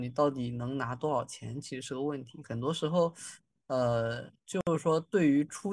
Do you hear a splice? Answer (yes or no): no